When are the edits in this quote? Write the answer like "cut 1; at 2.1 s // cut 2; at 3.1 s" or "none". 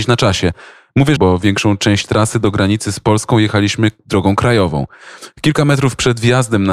cut 1; at 1.2 s